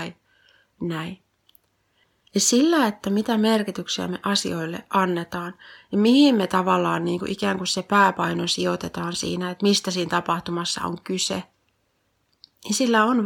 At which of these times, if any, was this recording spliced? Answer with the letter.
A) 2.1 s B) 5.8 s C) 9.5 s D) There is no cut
D